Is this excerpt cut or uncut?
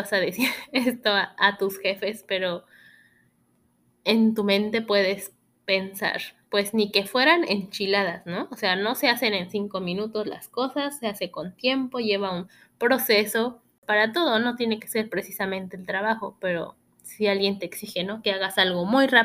uncut